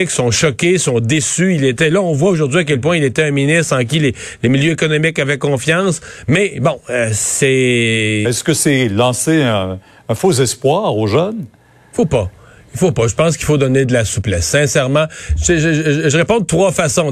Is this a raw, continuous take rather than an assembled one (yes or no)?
no